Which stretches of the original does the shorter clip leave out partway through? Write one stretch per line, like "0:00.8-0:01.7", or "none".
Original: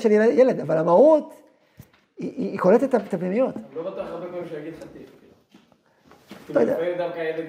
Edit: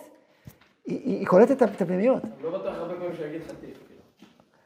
none